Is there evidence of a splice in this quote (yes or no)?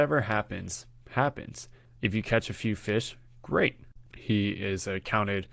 yes